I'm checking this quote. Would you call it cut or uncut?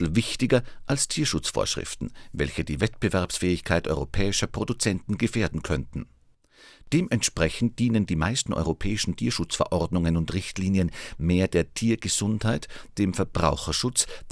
uncut